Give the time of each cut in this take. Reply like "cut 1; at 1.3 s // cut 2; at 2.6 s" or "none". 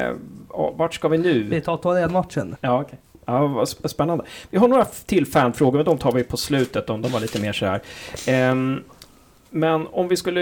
cut 1; at 2.6 s

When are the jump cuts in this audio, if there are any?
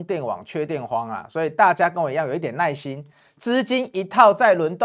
none

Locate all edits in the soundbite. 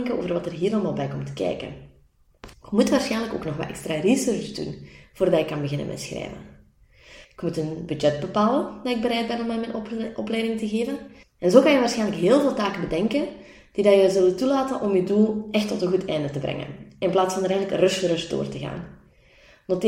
cut 1; at 2.5 s // cut 2; at 7.2 s // cut 3; at 11.2 s

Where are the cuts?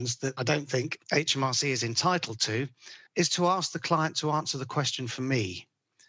cut 1; at 3.1 s

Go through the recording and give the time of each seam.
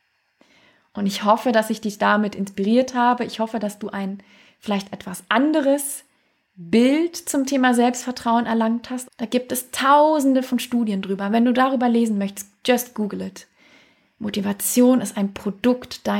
cut 1; at 9.1 s

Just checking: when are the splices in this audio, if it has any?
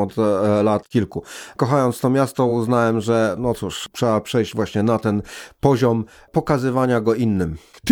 none

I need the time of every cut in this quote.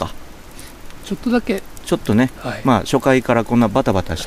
cut 1; at 2.4 s

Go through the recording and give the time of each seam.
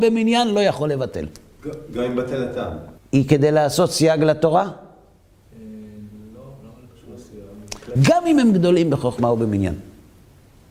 cut 1; at 3.0 s // cut 2; at 8.0 s

